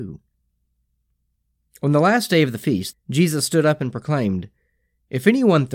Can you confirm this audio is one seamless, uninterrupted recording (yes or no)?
no